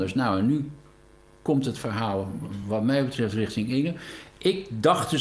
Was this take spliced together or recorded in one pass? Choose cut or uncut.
uncut